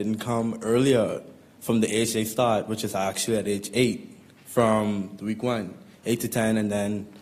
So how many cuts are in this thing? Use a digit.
0